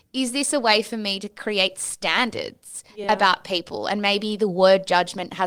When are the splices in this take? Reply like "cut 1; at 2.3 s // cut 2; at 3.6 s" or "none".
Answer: none